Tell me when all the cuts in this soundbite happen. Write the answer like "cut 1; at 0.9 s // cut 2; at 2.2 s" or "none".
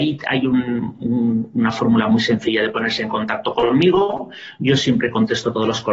none